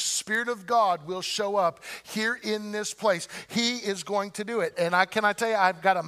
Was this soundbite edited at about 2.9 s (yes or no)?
no